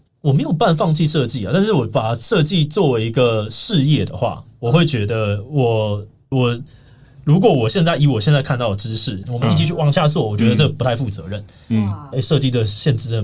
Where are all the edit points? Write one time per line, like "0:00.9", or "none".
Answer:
0:06.3
0:09.2
0:12.1